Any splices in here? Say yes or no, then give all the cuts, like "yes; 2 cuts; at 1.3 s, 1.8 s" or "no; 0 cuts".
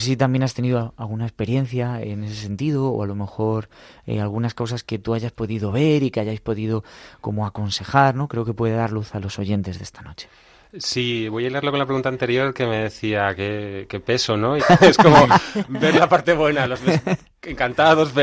yes; 1 cut; at 14.6 s